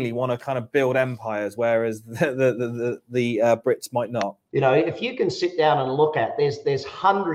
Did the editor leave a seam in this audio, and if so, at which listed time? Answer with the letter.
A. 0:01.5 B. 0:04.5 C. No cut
B